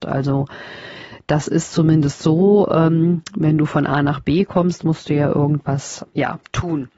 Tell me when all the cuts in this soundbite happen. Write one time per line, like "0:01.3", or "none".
0:06.0